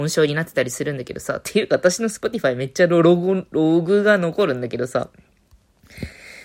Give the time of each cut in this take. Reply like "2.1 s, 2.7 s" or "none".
none